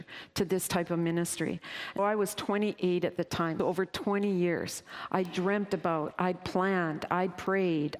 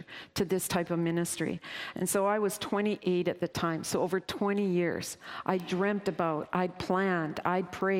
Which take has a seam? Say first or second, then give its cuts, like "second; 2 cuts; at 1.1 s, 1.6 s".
first; 2 cuts; at 2.0 s, 3.6 s